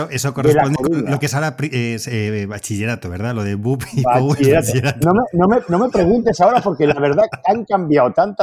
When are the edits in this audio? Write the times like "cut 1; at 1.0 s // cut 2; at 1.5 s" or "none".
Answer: none